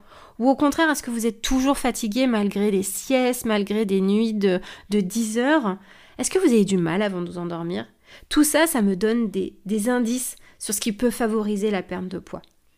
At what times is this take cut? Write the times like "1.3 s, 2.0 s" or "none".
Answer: none